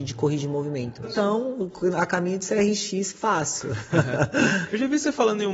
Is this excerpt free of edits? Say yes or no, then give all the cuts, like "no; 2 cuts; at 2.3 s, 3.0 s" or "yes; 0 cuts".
no; 1 cut; at 1.0 s